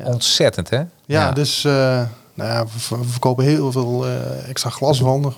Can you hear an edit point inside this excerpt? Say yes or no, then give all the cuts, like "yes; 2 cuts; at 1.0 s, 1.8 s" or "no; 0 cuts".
no; 0 cuts